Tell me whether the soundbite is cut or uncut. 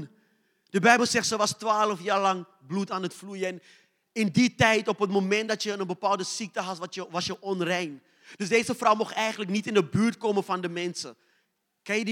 uncut